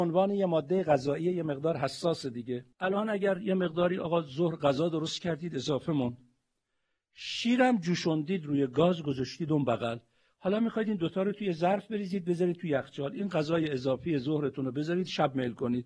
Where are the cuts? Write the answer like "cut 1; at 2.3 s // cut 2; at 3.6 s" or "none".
cut 1; at 2.7 s